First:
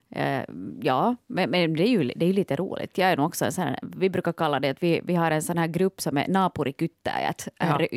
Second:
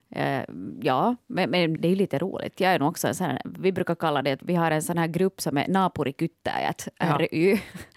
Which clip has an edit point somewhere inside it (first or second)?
second